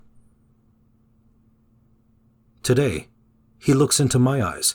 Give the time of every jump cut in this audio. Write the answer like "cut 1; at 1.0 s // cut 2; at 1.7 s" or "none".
cut 1; at 2.4 s